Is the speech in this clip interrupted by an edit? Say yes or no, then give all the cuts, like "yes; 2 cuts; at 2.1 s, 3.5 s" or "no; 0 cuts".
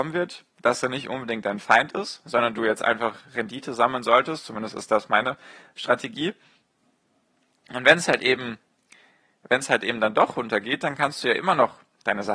no; 0 cuts